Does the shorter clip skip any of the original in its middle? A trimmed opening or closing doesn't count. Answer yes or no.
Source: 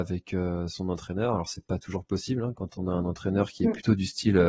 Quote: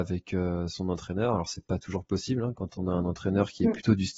no